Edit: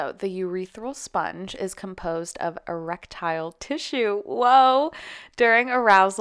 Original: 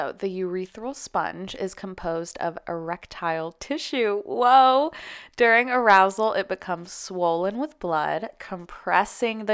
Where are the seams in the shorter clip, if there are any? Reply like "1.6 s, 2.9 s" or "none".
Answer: none